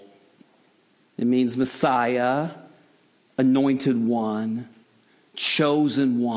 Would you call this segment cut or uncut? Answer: uncut